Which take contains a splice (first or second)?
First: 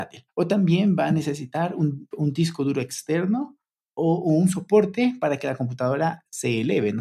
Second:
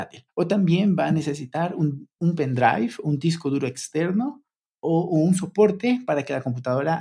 first